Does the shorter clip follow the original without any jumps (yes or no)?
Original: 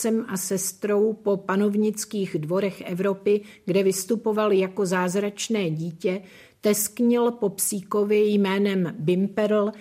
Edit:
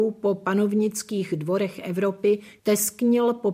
no